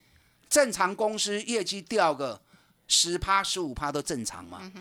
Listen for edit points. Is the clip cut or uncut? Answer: uncut